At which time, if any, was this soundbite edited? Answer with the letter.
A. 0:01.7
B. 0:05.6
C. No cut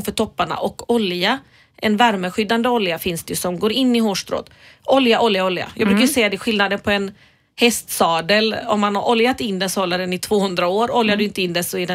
C